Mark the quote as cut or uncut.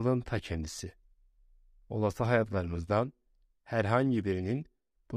uncut